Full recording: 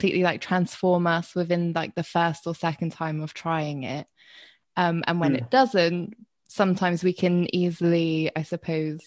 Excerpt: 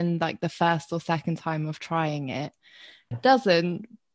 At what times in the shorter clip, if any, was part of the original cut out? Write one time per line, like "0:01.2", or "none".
0:03.1